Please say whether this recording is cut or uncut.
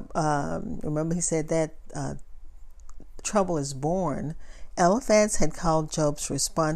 cut